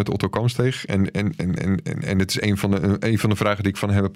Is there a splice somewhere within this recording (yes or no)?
no